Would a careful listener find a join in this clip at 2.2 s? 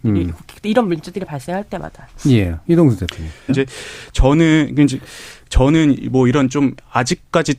no; 1 cut; at 3.5 s

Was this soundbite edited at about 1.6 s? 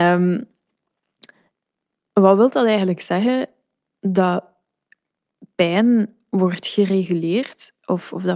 no; 0 cuts

